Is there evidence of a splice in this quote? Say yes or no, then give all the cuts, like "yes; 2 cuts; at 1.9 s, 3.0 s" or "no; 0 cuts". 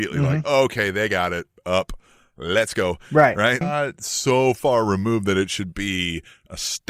yes; 1 cut; at 3.6 s